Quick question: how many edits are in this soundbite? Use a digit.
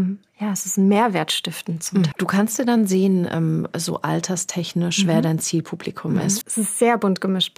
2